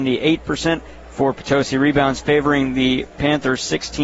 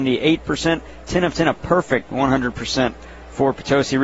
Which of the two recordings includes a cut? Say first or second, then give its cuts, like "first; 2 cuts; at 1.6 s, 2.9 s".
first; 1 cut; at 1.0 s